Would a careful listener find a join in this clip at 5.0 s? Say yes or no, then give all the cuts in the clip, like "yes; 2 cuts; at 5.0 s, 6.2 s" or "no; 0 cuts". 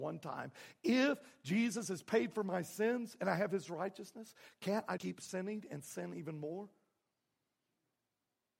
yes; 1 cut; at 5.0 s